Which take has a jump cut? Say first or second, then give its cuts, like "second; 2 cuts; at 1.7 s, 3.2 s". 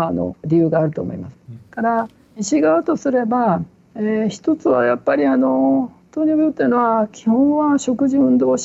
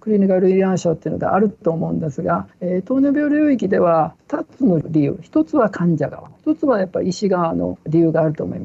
first; 1 cut; at 1.5 s